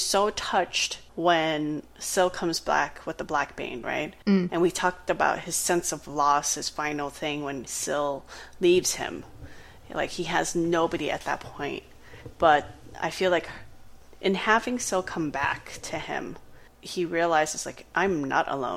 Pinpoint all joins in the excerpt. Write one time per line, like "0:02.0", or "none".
none